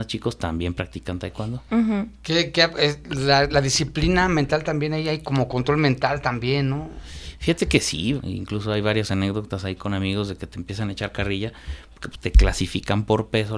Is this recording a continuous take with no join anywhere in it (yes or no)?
no